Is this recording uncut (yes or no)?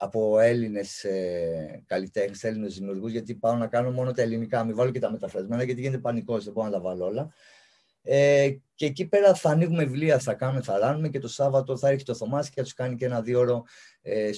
no